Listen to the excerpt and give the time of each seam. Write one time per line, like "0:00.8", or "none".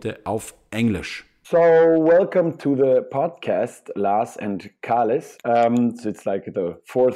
0:01.4
0:05.4